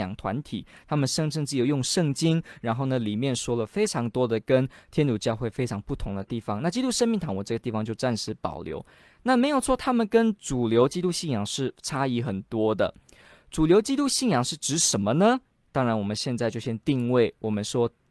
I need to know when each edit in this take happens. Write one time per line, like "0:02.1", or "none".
none